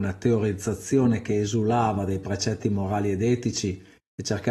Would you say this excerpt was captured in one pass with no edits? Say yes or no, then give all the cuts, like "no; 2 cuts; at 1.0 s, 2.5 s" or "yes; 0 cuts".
yes; 0 cuts